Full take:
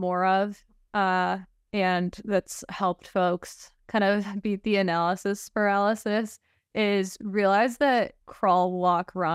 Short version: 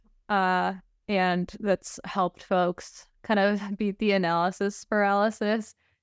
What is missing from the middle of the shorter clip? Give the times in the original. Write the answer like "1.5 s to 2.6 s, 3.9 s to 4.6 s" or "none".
none